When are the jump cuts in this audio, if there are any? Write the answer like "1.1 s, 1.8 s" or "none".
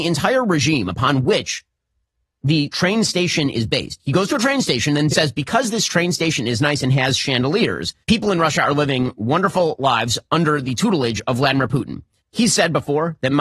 5.1 s, 8.0 s, 12.2 s